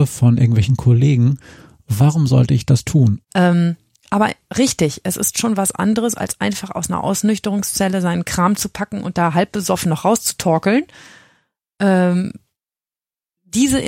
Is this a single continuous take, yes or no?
no